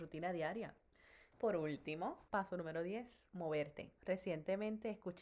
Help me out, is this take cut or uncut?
cut